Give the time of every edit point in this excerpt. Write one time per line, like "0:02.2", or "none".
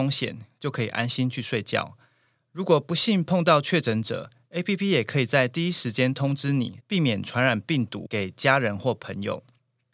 0:06.8